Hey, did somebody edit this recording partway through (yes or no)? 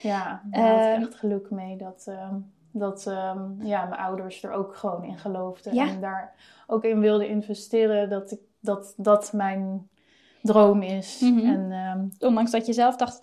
no